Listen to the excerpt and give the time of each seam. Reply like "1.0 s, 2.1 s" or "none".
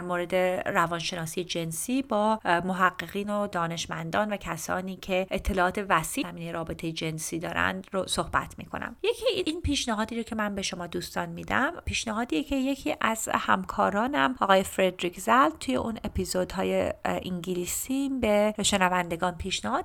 6.2 s